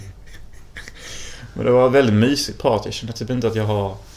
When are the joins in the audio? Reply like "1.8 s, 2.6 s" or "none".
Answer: none